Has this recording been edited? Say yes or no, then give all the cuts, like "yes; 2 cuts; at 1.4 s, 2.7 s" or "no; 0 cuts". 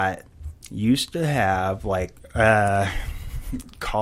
no; 0 cuts